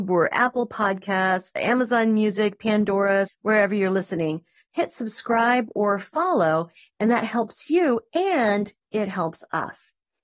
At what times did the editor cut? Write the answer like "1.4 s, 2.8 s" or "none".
3.3 s, 4.7 s